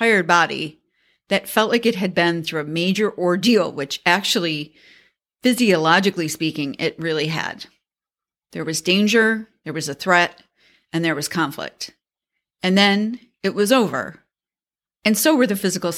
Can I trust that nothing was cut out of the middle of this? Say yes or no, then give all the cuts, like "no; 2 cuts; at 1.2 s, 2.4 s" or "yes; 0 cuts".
yes; 0 cuts